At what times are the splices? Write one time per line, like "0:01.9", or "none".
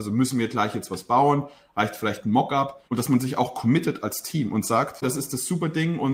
0:02.9
0:05.0